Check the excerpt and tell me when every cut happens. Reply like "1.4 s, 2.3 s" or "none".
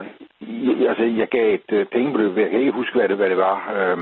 none